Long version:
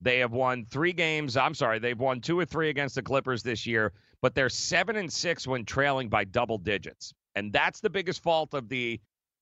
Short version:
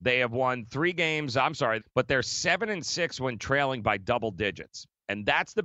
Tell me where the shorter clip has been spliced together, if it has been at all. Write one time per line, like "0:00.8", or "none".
0:01.8